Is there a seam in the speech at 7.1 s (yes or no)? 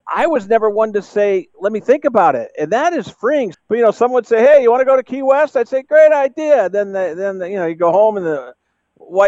no